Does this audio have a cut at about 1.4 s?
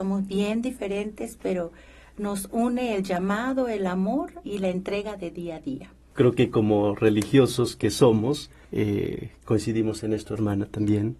no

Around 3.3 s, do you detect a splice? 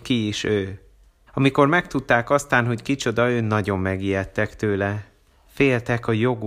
no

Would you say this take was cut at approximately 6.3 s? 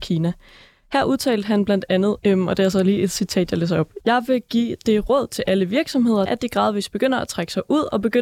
yes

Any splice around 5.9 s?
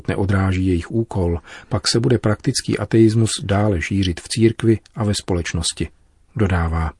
no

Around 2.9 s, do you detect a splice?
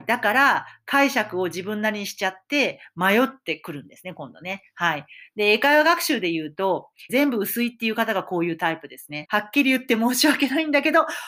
no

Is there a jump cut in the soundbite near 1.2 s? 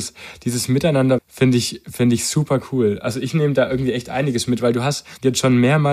yes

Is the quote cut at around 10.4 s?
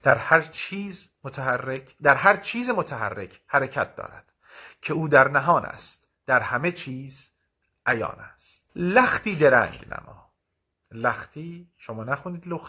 no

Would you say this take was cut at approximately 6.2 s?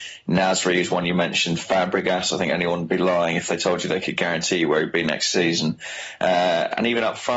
no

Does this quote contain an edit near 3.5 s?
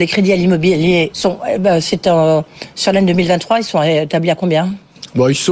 no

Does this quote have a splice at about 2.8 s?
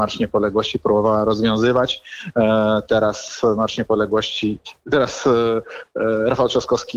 no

